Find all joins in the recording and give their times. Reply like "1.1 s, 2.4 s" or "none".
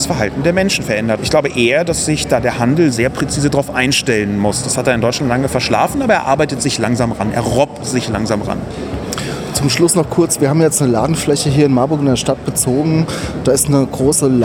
1.2 s